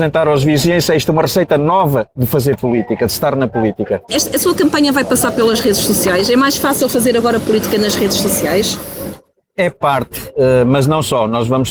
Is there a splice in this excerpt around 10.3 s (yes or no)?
no